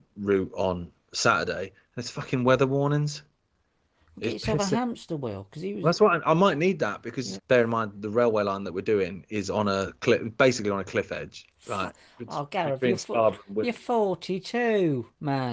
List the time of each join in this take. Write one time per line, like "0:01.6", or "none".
0:07.4